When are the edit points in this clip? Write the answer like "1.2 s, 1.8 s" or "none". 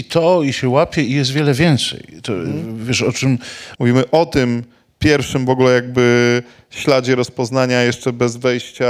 3.7 s